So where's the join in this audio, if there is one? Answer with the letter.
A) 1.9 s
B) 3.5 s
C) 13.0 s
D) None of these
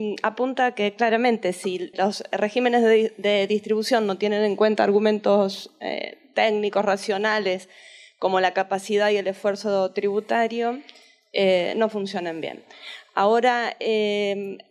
A